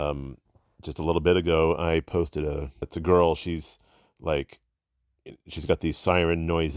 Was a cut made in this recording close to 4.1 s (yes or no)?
no